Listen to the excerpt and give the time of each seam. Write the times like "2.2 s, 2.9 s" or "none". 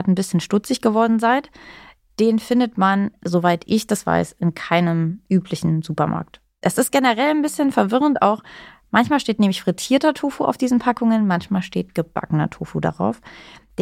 none